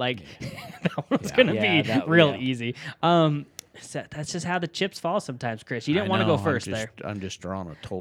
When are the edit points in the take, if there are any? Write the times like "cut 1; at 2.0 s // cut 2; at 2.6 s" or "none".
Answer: none